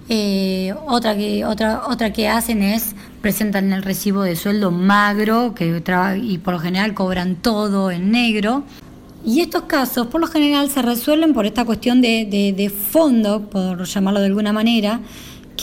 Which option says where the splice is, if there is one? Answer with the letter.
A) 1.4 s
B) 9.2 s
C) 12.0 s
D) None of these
D